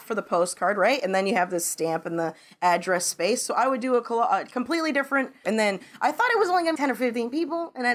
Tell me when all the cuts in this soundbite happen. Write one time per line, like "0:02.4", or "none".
0:05.4
0:06.8